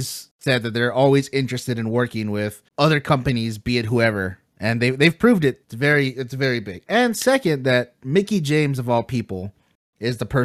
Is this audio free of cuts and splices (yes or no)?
no